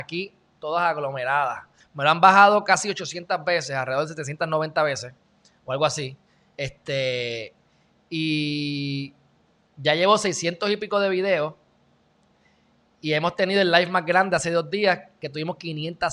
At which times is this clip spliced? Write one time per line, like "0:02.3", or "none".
0:01.8